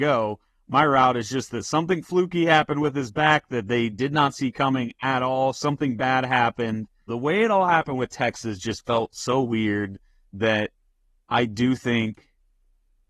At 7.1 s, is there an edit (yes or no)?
yes